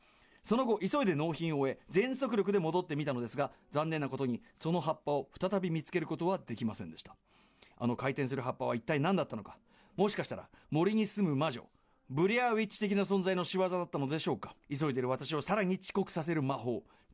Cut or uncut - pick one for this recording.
cut